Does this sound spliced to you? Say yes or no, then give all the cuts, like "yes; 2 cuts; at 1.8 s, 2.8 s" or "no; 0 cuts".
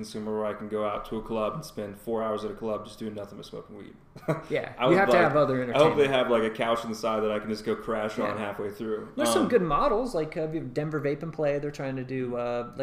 no; 0 cuts